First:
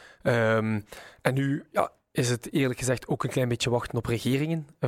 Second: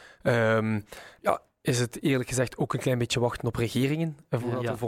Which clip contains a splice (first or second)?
second